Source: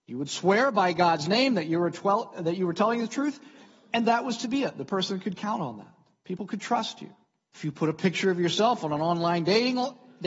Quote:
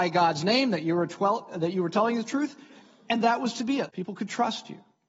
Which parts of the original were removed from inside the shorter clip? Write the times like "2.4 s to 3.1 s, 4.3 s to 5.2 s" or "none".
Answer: 4.7 s to 6.2 s